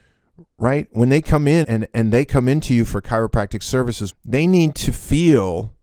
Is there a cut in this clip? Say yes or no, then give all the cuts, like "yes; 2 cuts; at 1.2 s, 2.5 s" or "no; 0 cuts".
yes; 2 cuts; at 1.6 s, 4.1 s